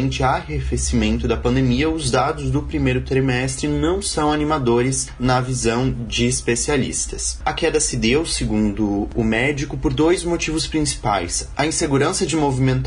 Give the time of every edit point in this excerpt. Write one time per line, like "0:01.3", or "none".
0:07.4